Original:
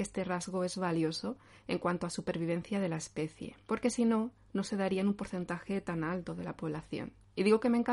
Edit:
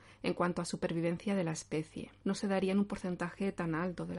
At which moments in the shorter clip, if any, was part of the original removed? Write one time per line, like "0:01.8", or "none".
0:02.2